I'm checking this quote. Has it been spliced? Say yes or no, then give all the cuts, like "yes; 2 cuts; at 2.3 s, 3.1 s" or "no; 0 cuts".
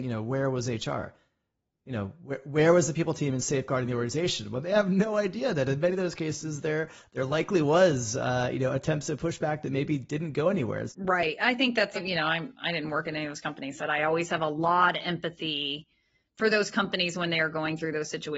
yes; 3 cuts; at 10.9 s, 12.0 s, 13.8 s